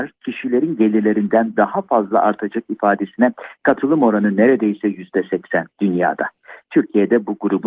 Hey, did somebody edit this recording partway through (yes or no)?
yes